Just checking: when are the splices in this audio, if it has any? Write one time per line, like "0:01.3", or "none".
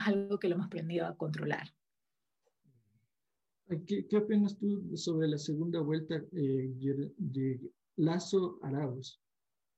none